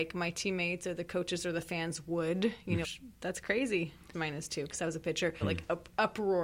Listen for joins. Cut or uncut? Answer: cut